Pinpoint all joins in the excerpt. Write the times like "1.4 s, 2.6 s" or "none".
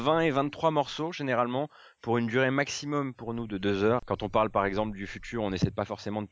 4.0 s